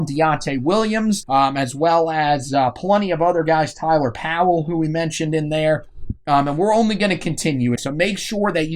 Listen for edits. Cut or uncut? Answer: cut